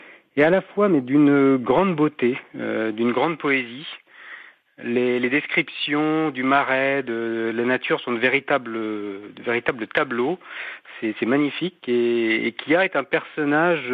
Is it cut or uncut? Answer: uncut